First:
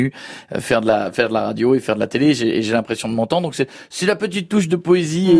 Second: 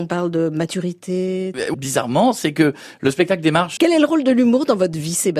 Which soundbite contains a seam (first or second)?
second